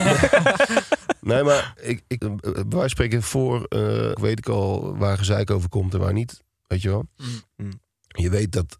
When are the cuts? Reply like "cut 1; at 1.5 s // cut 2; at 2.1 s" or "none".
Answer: cut 1; at 2.2 s // cut 2; at 4.2 s